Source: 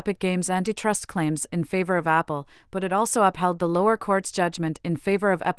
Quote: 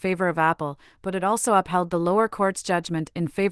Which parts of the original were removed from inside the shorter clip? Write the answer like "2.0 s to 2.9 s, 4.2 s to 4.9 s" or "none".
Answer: none